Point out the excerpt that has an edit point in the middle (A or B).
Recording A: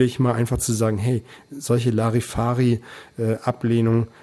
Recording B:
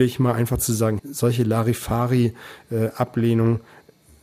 B